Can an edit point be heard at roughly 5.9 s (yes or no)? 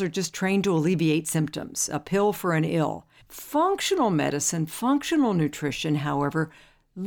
no